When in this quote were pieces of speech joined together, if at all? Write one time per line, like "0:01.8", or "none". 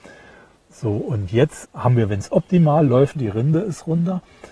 0:01.6
0:03.1